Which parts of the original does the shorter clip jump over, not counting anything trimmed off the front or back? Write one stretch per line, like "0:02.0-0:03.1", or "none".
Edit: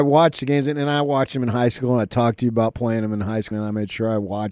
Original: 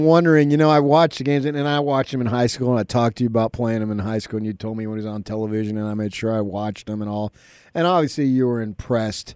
0:04.3-0:05.7